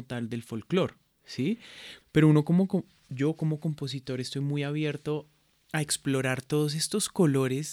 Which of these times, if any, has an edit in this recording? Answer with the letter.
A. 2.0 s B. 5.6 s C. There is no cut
A